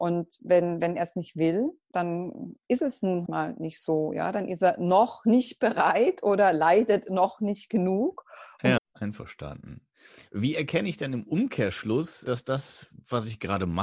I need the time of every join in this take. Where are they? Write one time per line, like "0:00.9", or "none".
0:03.3
0:08.8